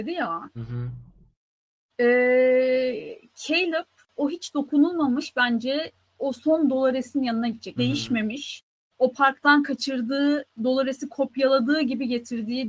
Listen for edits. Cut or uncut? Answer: cut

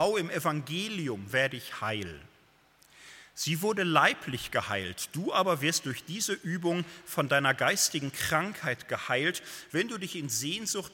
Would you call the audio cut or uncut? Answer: cut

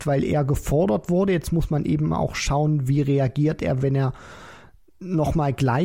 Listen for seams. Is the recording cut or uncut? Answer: uncut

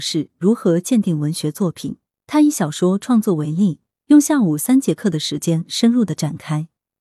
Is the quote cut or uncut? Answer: uncut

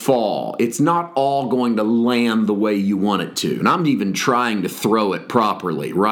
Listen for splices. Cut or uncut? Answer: cut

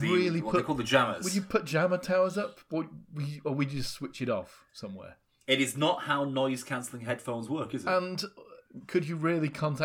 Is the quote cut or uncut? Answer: uncut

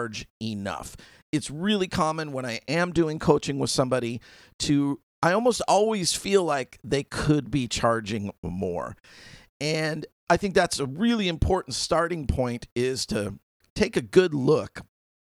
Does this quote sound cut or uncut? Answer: uncut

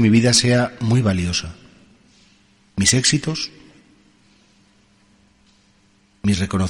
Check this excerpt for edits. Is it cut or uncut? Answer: uncut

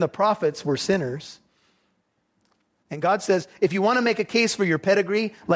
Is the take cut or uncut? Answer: uncut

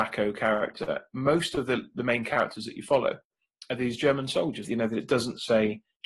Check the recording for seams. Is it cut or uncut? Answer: cut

